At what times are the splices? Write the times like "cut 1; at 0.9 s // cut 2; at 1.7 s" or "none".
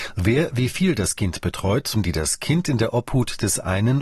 cut 1; at 1.9 s